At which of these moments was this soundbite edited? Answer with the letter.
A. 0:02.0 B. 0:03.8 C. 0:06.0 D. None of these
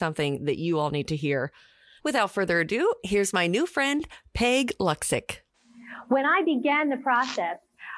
A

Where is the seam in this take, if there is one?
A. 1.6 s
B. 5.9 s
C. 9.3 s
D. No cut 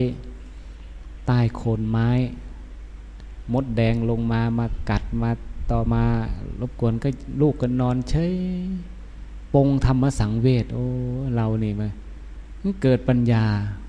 B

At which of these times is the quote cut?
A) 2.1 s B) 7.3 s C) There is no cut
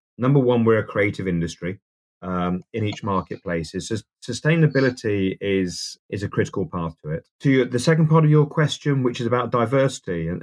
A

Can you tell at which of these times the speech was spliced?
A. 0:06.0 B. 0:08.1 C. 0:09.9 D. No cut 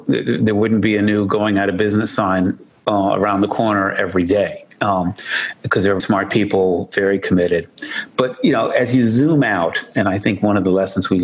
A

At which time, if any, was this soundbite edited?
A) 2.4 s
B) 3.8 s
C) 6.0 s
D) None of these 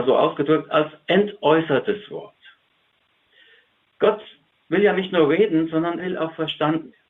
C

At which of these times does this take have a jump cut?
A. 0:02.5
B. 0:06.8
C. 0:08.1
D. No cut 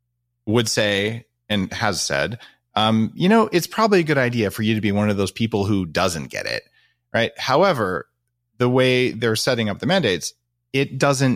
D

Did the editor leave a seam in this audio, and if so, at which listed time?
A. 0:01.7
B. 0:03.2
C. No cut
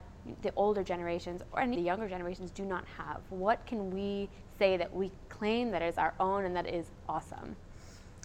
A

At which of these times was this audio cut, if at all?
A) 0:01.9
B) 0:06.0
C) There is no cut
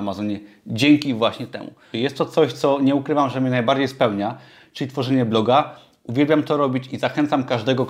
A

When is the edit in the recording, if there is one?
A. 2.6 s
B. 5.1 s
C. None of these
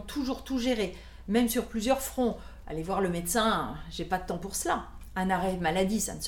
A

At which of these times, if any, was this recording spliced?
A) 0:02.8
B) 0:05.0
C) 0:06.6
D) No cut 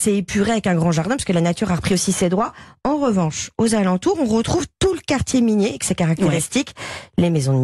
D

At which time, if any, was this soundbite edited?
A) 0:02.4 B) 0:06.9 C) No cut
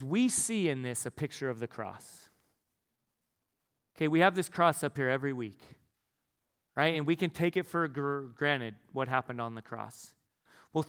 C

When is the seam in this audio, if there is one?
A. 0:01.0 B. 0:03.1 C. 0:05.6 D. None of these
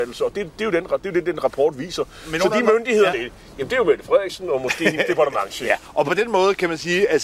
B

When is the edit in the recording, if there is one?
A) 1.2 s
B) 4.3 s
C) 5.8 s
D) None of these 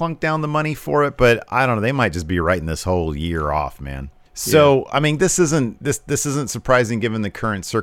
B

